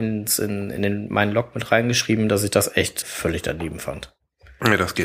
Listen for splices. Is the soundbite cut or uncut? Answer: cut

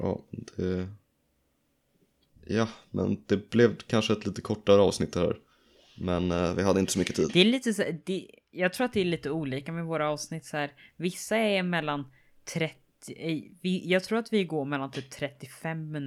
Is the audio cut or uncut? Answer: uncut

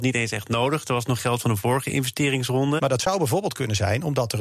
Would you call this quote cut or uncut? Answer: cut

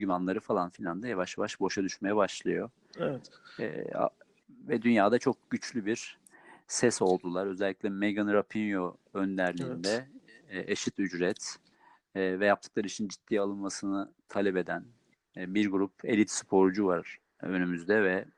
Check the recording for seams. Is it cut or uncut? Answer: uncut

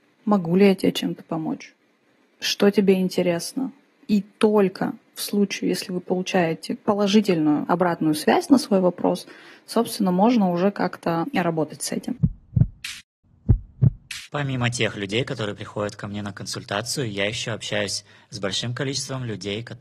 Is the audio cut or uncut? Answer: uncut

